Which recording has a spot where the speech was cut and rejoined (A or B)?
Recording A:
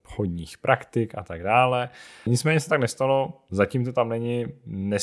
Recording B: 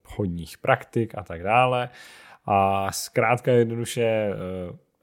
A